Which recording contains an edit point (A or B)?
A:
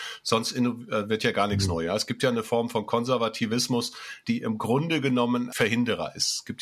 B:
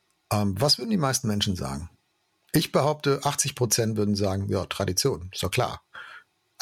A